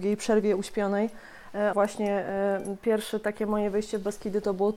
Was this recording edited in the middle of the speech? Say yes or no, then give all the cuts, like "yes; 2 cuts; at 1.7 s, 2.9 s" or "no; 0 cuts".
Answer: yes; 1 cut; at 1.7 s